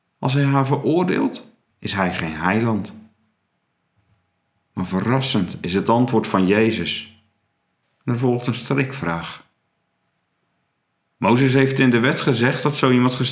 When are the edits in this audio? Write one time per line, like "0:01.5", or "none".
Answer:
0:01.7
0:07.8